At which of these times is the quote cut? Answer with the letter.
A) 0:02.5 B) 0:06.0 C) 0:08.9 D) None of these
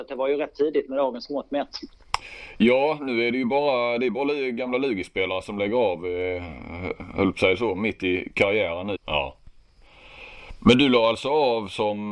C